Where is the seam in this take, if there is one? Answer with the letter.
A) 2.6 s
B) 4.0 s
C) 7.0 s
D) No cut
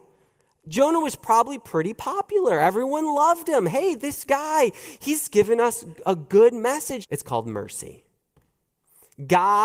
C